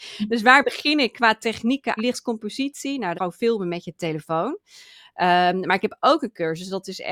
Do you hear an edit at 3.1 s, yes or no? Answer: yes